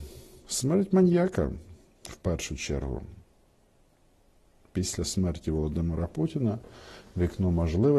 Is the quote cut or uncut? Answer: uncut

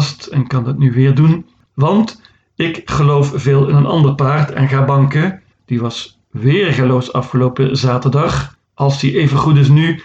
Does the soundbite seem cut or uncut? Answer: cut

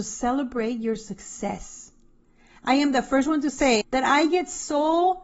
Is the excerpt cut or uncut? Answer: cut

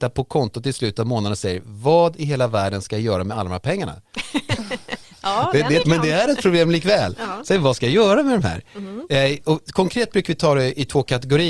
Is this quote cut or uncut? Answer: cut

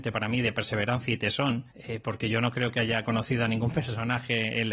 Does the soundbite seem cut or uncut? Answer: cut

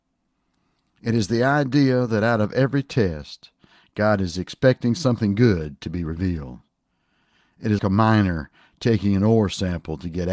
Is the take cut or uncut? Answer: cut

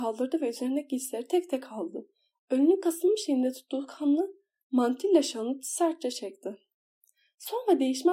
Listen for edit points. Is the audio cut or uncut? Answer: uncut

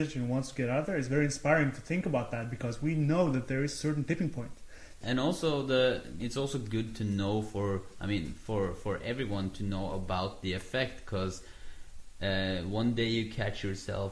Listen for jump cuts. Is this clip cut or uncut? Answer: cut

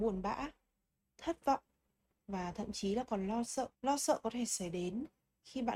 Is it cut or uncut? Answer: cut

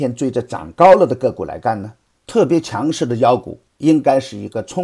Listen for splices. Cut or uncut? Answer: cut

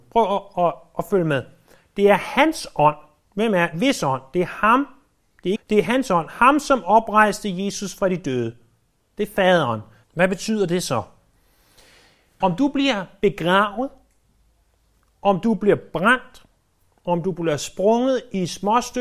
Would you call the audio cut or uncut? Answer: cut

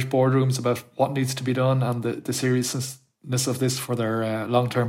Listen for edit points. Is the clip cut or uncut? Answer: uncut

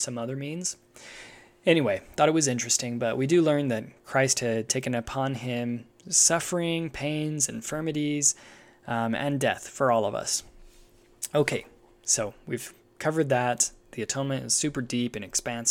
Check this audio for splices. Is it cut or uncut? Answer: uncut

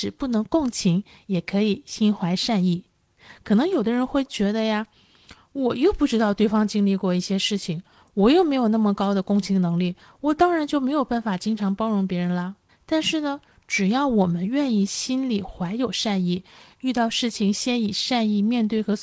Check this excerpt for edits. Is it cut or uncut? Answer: cut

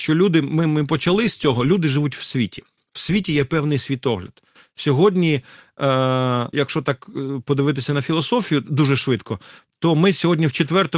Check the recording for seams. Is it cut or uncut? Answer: cut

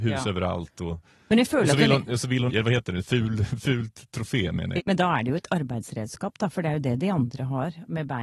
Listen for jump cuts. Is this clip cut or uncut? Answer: cut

